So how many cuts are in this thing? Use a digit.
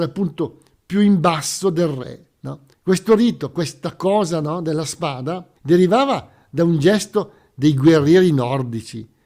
2